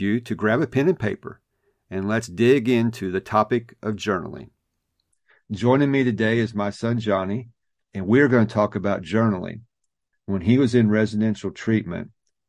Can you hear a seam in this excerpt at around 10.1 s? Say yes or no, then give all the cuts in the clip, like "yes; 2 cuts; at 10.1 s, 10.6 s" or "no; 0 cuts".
yes; 1 cut; at 10.1 s